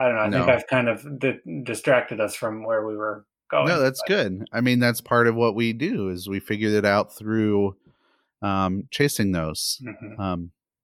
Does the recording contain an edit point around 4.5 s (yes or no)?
no